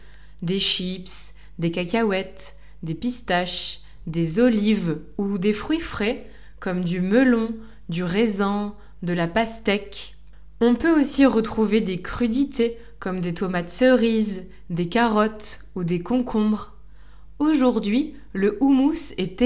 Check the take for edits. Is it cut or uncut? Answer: uncut